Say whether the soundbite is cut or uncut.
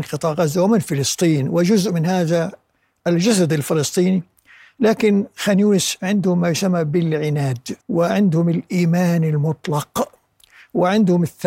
cut